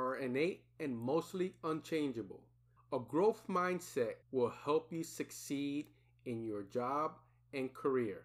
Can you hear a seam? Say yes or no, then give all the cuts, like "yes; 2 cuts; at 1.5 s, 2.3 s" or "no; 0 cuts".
yes; 2 cuts; at 2.8 s, 4.2 s